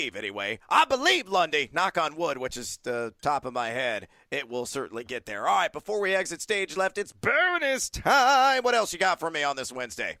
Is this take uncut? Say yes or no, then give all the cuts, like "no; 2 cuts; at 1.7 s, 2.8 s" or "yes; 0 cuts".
yes; 0 cuts